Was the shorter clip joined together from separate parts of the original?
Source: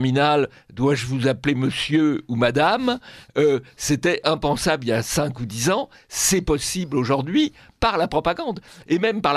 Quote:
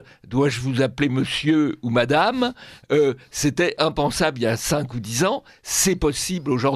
no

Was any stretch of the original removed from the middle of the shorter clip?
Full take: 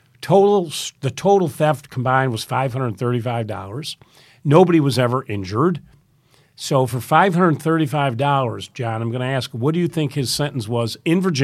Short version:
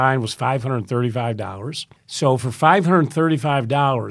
yes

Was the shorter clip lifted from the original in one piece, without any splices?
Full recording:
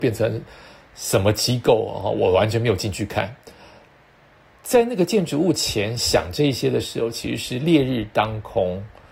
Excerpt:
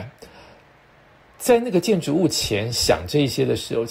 yes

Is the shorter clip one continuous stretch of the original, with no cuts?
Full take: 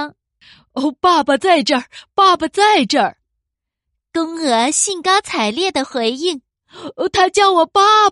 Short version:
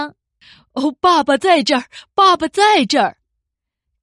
yes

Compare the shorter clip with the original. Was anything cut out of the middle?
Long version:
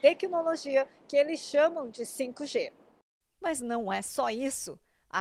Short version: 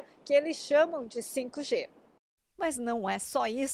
no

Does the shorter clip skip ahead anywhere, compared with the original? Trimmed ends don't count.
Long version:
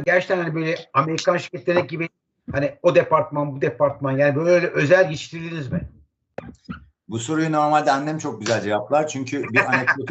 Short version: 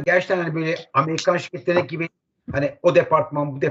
no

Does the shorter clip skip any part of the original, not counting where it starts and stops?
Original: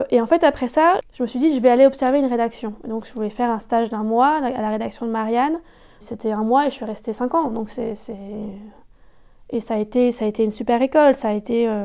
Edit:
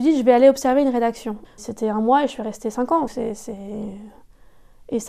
yes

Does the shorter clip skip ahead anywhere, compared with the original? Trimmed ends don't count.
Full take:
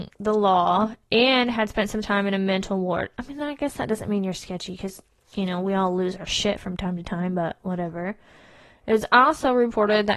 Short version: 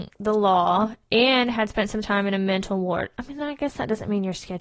no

